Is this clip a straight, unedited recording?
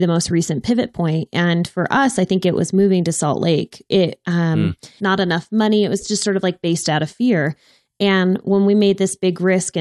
no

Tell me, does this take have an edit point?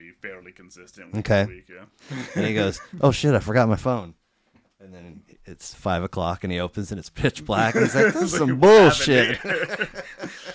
yes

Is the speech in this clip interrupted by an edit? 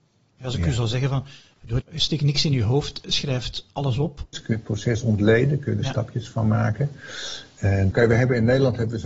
yes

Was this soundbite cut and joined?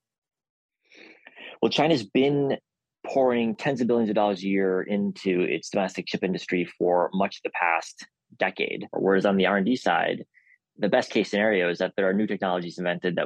yes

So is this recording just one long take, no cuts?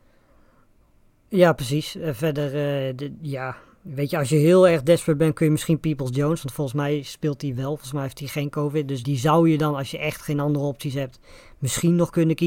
no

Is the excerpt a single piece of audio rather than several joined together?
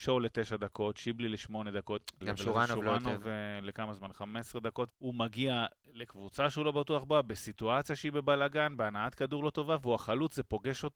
no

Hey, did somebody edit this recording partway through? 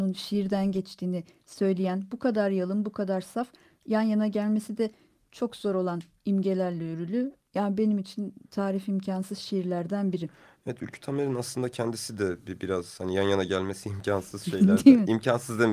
yes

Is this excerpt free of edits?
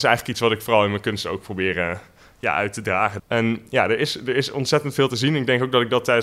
no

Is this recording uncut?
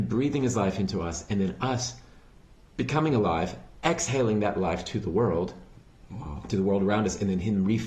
yes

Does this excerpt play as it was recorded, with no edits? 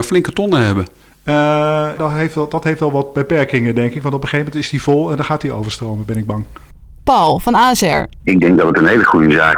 no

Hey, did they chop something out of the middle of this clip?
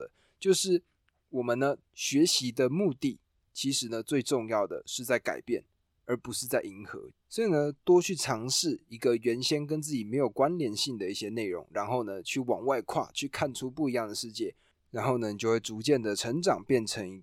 no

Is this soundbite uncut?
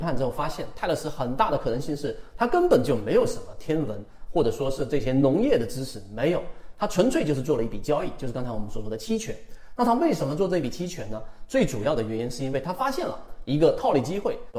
yes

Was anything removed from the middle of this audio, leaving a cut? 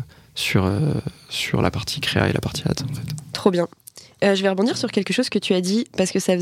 no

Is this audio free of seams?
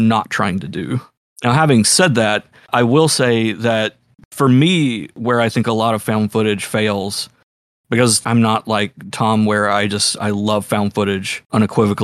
yes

